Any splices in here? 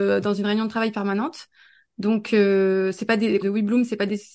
yes; 1 cut; at 3.4 s

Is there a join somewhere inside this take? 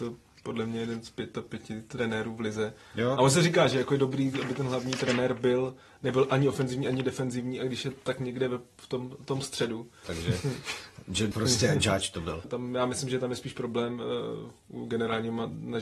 yes; 3 cuts; at 10.0 s, 11.3 s, 12.4 s

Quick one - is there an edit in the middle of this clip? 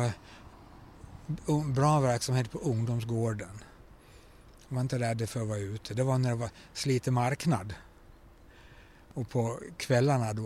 no; 0 cuts

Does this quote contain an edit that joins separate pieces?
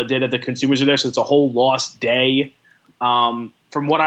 no; 0 cuts

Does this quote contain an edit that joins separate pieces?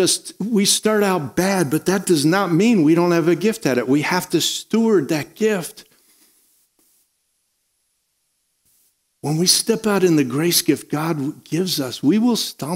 no; 0 cuts

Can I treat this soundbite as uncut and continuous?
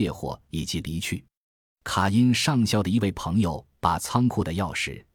yes; 0 cuts

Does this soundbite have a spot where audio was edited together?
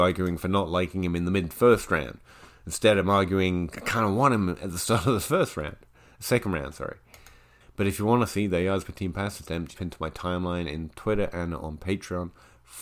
yes; 2 cuts; at 7.6 s, 9.7 s

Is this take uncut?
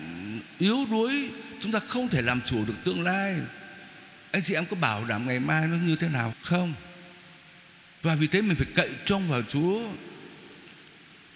no; 1 cut; at 6.3 s

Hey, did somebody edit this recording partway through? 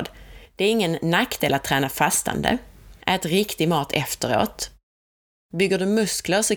yes; 1 cut; at 3.0 s

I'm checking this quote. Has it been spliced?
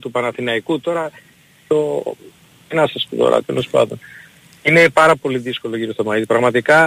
yes; 1 cut; at 3.4 s

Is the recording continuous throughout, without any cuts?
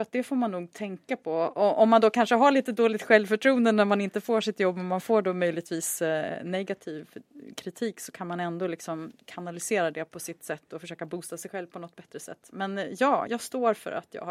no; 1 cut; at 13.3 s

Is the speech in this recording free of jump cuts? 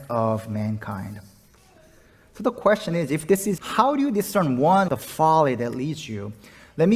no; 2 cuts; at 3.6 s, 4.9 s

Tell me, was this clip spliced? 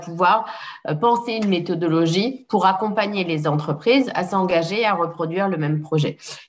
no; 0 cuts

